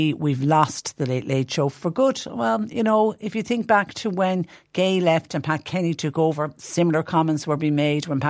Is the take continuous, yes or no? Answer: yes